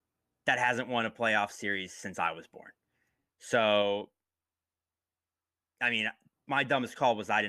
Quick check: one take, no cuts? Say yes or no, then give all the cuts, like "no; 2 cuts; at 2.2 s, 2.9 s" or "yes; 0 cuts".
yes; 0 cuts